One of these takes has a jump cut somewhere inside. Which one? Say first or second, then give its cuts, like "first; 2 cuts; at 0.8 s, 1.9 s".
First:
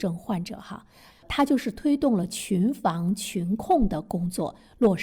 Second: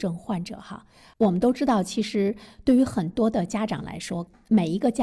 first; 1 cut; at 1.1 s